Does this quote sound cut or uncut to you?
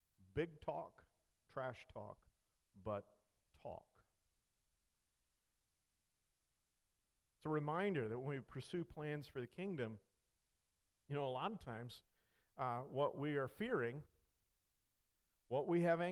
uncut